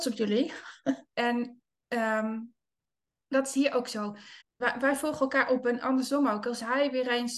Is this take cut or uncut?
cut